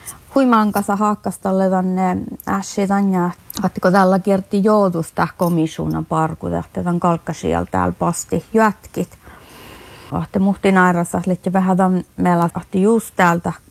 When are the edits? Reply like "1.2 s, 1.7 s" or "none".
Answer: 10.1 s, 12.5 s